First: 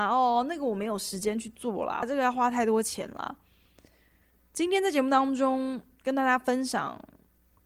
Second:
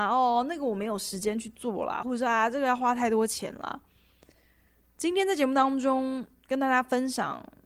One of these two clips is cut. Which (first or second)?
first